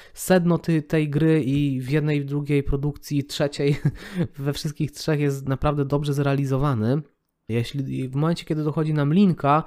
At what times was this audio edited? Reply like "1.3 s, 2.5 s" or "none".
7.5 s